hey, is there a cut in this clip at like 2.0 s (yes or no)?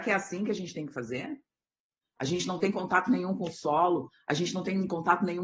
yes